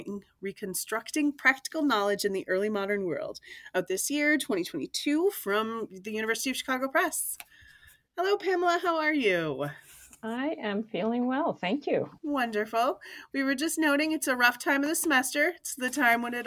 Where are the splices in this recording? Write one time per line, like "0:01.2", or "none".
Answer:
0:12.2